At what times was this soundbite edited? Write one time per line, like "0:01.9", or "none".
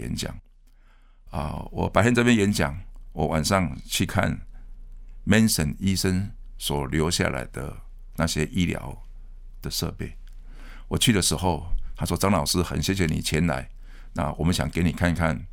none

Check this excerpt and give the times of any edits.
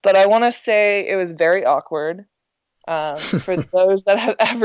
none

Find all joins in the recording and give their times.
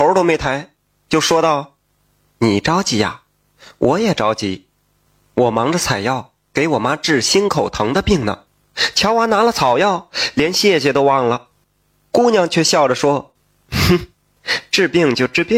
0:08.5
0:11.6

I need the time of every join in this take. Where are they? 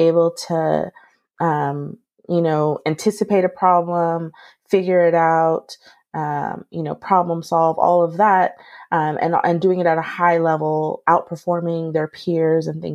none

